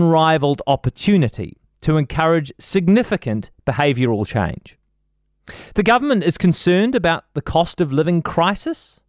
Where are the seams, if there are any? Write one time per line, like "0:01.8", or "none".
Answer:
none